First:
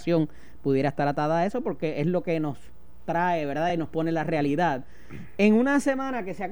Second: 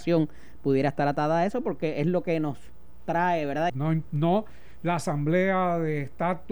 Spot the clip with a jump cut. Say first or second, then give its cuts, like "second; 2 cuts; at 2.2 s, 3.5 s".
second; 1 cut; at 3.7 s